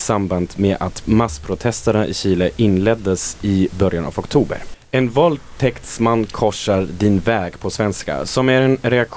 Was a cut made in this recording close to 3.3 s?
no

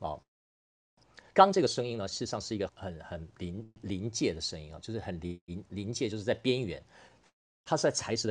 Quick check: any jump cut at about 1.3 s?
no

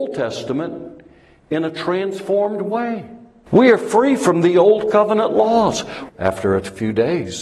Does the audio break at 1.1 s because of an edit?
no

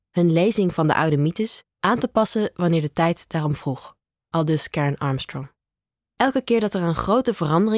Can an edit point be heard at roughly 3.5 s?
no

